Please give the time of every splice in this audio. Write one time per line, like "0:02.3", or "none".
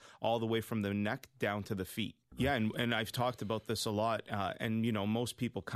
0:02.3